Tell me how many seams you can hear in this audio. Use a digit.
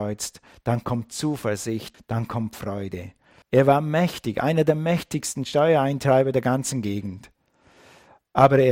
2